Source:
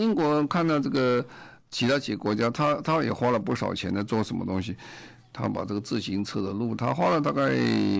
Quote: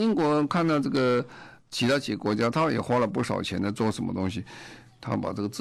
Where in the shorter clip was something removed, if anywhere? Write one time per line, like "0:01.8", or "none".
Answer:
0:02.5